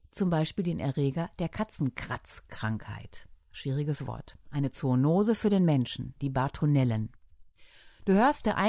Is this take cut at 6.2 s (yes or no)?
yes